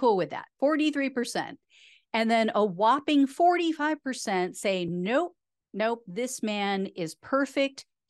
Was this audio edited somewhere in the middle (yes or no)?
no